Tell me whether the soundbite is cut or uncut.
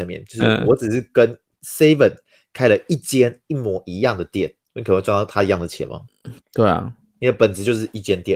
cut